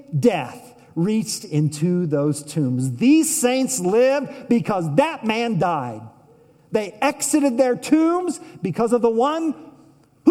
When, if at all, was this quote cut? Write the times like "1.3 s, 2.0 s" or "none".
none